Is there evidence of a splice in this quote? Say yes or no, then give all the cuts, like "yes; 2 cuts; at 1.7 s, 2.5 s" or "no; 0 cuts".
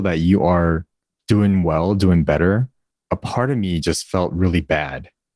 no; 0 cuts